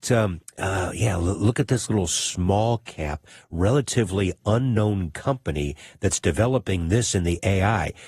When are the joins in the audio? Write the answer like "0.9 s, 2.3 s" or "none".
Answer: none